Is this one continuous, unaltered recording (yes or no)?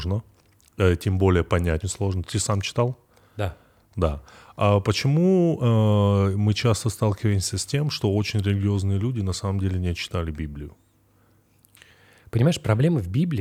no